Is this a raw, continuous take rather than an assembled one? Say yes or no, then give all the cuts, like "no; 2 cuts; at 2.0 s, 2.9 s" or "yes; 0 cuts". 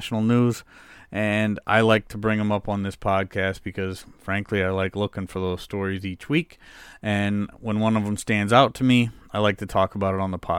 yes; 0 cuts